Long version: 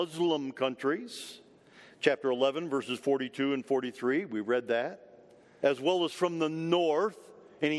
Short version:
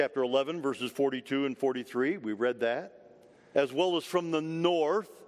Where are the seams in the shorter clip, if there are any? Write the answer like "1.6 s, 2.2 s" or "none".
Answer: none